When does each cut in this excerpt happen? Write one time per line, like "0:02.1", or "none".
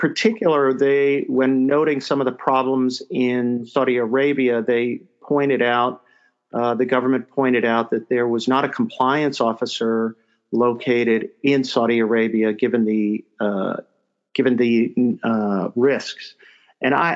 none